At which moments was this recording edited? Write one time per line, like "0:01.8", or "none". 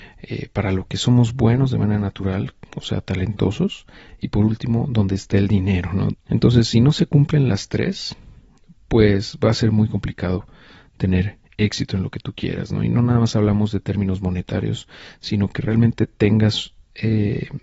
0:06.1